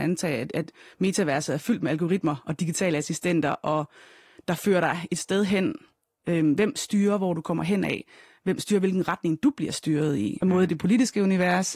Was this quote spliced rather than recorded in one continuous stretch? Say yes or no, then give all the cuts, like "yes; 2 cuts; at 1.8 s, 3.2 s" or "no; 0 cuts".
yes; 1 cut; at 10.4 s